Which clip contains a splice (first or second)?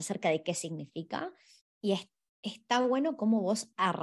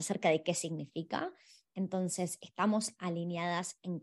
first